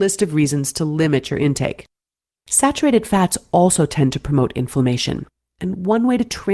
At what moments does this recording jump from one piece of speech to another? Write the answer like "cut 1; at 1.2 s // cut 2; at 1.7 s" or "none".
none